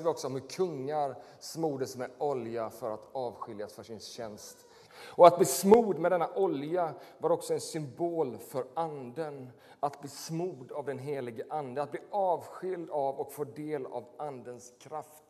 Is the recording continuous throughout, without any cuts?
no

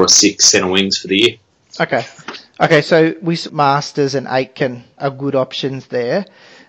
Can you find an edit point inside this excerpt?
yes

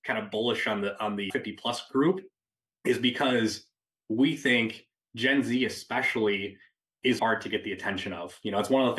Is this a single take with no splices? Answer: no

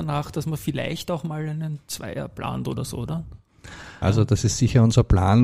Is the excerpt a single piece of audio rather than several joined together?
no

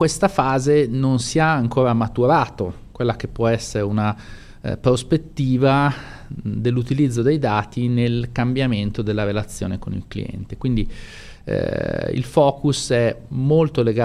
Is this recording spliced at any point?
no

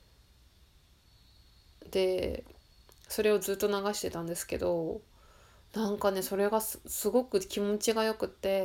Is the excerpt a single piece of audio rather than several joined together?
yes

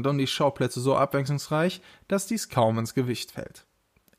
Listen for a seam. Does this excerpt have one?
no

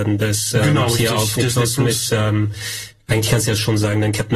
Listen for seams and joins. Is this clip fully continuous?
no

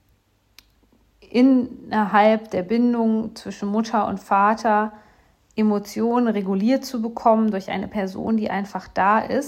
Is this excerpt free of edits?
yes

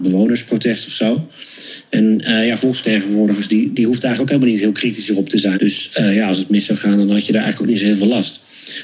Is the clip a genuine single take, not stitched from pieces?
no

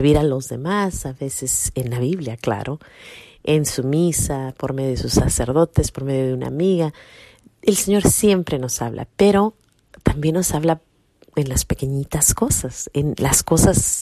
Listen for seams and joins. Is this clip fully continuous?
yes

